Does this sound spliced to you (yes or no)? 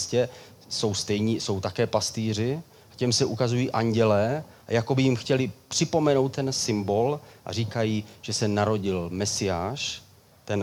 no